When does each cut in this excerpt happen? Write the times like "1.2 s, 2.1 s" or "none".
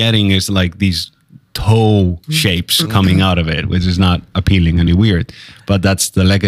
2.2 s, 4.9 s